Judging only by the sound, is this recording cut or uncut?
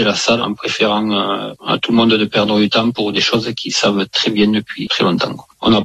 cut